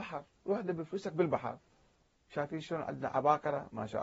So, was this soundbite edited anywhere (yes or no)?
no